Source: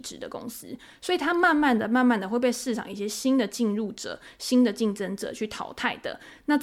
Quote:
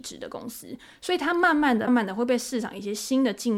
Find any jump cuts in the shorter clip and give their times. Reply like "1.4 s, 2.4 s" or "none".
1.9 s